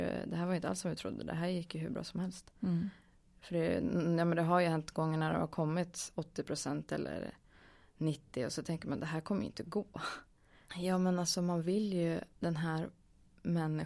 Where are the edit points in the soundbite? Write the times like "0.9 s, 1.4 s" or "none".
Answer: 10.7 s, 12.3 s